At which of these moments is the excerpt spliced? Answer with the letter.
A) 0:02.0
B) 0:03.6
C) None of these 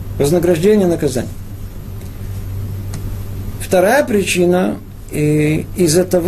B